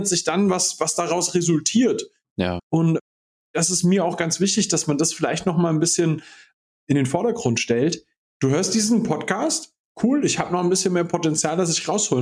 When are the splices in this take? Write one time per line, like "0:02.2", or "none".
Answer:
0:02.6
0:08.3
0:09.9